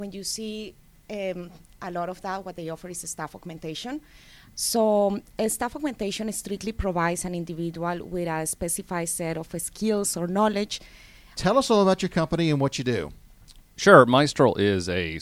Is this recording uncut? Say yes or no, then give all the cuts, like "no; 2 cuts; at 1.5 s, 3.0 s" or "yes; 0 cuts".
no; 3 cuts; at 1.8 s, 4.5 s, 11.4 s